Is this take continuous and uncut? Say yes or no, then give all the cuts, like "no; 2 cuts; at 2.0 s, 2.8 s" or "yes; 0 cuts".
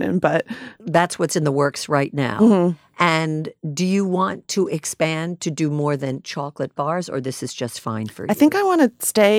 yes; 0 cuts